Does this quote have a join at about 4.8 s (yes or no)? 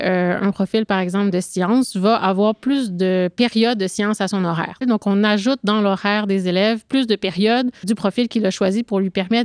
yes